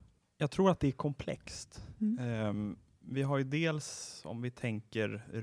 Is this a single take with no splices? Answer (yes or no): yes